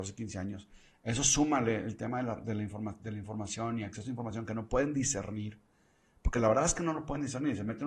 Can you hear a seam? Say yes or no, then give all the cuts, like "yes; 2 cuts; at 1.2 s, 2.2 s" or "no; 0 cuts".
no; 0 cuts